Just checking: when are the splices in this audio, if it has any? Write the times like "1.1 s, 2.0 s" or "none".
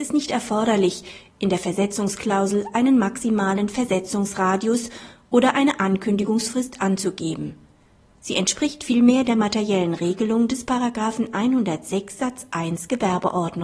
8.2 s